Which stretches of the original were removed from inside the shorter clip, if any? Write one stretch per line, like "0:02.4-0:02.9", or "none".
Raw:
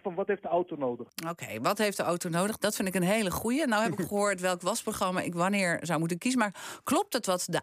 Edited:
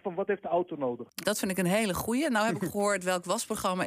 0:01.2-0:02.6